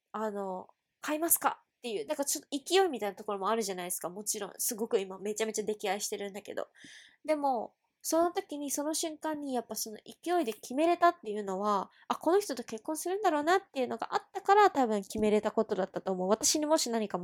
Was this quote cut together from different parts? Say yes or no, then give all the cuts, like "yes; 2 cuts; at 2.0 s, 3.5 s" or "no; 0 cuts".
no; 0 cuts